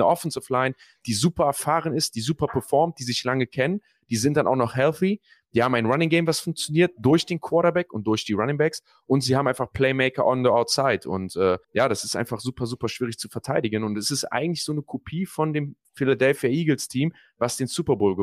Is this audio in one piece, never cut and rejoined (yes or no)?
no